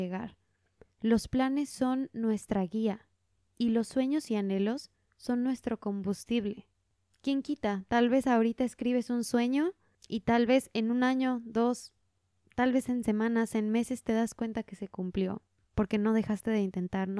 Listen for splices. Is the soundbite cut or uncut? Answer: uncut